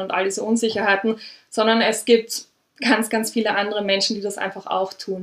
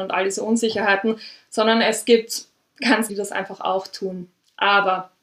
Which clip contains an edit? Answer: second; 1 cut; at 3.1 s

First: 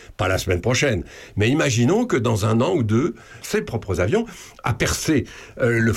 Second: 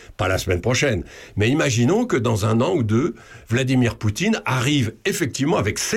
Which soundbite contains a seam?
first; 1 cut; at 3.4 s

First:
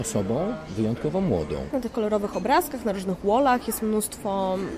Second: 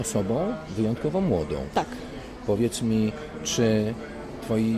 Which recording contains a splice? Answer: first; 1 cut; at 1.7 s

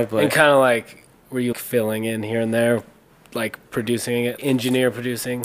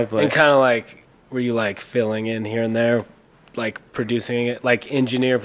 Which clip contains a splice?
first; 2 cuts; at 1.5 s, 4.4 s

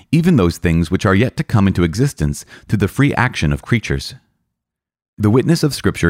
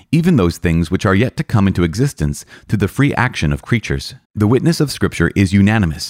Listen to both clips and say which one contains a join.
second; 1 cut; at 4.2 s

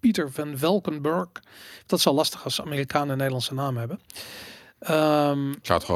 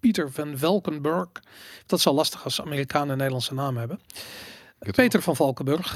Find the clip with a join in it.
second; 1 cut; at 4.8 s

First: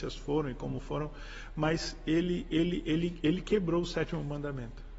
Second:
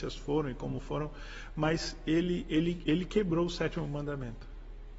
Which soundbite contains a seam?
second; 1 cut; at 2.5 s

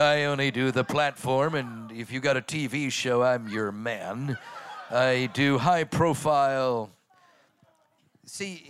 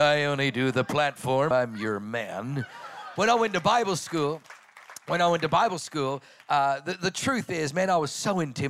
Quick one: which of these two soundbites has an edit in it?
second; 2 cuts; at 1.5 s, 3.2 s

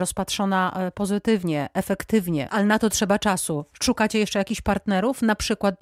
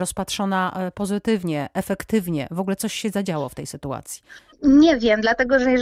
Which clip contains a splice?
first; 1 cut; at 2.5 s

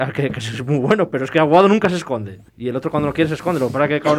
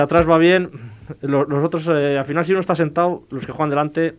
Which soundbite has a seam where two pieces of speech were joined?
first; 1 cut; at 2.5 s

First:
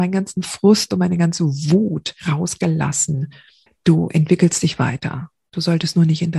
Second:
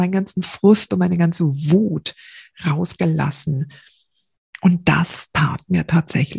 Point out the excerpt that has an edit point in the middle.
first; 2 cuts; at 2.2 s, 3.7 s

